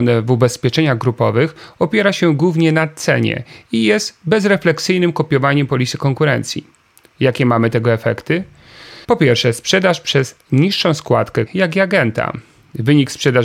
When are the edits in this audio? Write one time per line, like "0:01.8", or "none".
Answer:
0:09.0
0:11.5